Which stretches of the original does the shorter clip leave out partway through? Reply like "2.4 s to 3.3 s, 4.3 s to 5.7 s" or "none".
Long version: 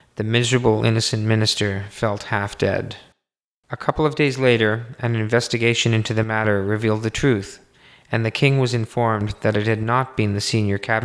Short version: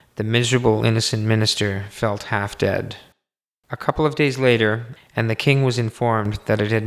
5.0 s to 7.9 s